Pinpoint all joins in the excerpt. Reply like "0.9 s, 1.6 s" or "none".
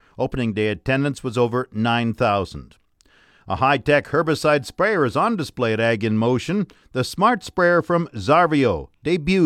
none